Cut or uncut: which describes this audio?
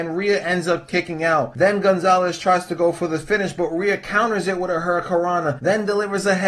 uncut